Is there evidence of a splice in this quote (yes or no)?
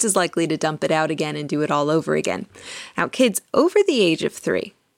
no